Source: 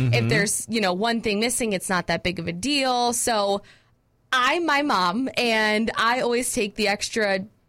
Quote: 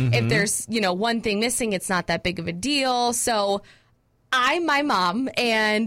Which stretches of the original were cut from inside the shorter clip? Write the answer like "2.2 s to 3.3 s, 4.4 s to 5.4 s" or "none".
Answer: none